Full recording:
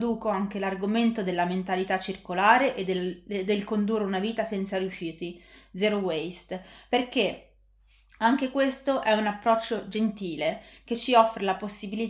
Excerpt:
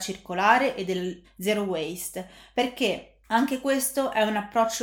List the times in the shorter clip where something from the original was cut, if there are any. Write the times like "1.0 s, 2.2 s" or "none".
1.2 s, 3.2 s